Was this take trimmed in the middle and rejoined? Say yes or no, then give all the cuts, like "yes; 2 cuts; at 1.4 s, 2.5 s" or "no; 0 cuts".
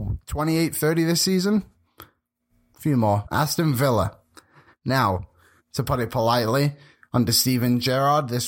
yes; 2 cuts; at 3.2 s, 5.6 s